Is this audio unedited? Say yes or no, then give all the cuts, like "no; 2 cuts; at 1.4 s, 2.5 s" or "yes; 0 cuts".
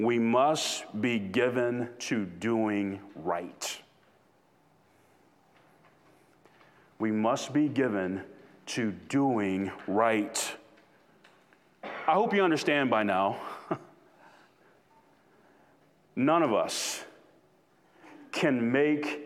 yes; 0 cuts